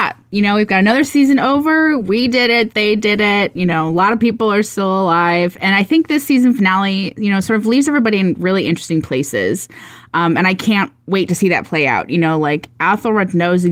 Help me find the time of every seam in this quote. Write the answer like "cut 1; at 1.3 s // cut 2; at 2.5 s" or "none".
none